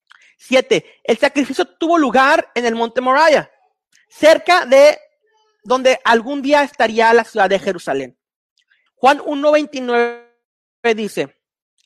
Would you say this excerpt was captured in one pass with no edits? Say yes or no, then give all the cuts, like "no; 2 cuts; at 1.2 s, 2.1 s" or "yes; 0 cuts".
no; 1 cut; at 8.9 s